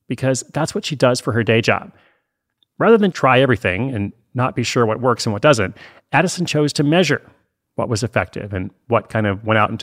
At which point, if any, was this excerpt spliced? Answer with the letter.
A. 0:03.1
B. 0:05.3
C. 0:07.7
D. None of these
A